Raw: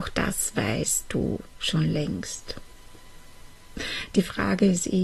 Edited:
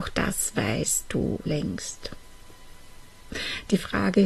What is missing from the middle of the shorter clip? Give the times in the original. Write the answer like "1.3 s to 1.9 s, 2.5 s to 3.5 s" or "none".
1.5 s to 1.9 s